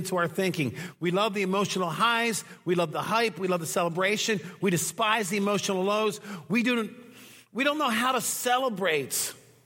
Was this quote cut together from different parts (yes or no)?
no